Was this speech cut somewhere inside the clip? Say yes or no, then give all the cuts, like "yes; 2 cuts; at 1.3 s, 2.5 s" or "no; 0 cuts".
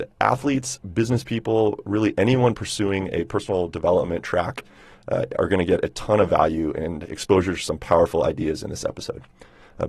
no; 0 cuts